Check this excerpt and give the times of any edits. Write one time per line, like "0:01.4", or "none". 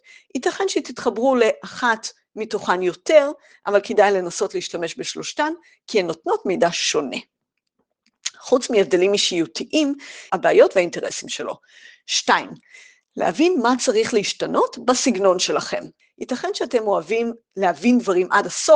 0:10.3
0:16.0